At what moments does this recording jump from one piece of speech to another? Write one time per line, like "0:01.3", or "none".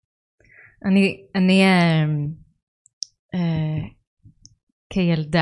none